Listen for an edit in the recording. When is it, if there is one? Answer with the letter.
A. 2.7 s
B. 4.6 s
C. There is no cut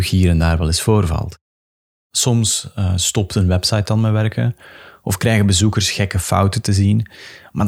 C